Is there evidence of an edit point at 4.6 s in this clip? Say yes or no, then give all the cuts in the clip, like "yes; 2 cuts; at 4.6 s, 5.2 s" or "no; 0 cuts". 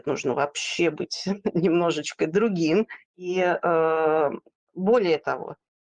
no; 1 cut; at 3.1 s